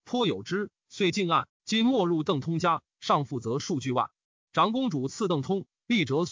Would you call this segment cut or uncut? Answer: uncut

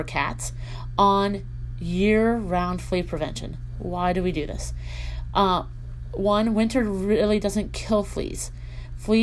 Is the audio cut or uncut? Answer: uncut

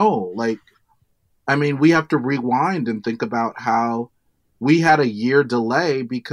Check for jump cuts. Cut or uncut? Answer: uncut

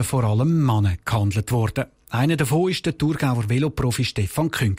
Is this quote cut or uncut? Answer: uncut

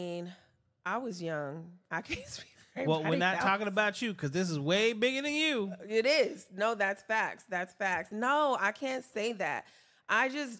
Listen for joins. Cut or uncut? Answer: uncut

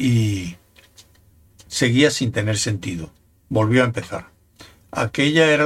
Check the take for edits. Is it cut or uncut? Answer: uncut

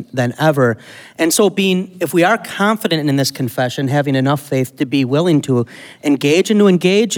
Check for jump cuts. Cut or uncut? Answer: uncut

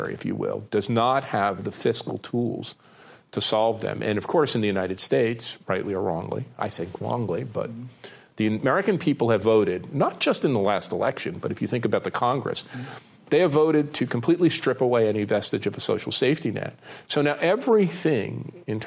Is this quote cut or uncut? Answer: cut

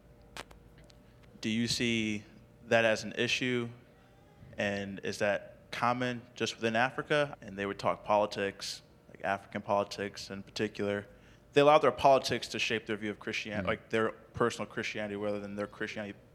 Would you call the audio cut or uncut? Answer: cut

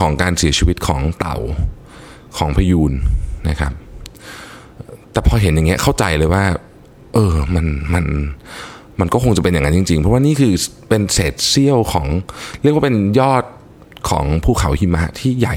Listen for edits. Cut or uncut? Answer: uncut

